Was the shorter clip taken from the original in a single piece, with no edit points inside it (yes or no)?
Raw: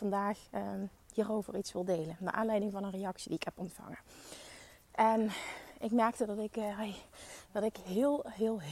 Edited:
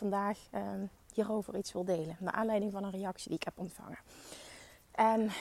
yes